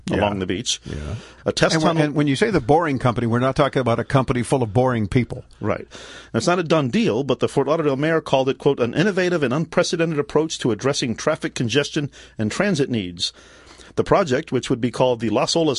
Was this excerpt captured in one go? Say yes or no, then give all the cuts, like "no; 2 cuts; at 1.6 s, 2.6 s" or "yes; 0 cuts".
no; 2 cuts; at 1.4 s, 5.9 s